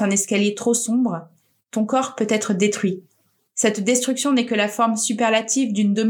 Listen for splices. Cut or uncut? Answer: cut